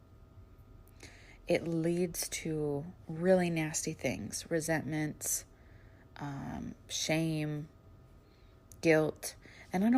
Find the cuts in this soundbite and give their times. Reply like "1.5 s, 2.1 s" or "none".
none